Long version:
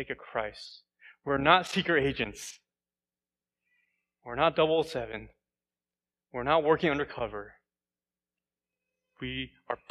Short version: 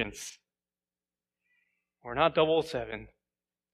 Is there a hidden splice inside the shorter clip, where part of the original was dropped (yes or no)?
no